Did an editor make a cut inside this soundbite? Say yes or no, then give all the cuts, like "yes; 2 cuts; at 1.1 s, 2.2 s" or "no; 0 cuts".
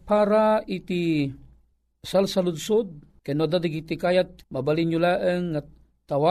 yes; 2 cuts; at 3.2 s, 4.4 s